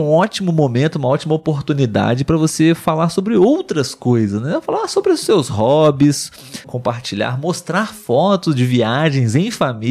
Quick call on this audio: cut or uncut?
cut